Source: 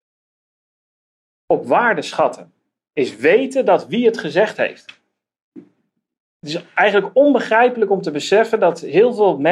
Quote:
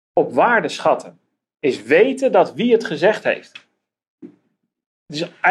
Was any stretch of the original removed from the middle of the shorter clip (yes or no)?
no